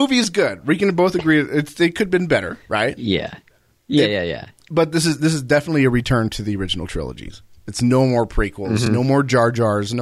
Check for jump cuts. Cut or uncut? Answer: uncut